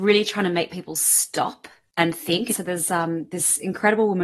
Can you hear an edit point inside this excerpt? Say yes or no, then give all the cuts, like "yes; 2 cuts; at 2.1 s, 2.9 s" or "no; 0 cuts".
yes; 1 cut; at 2.5 s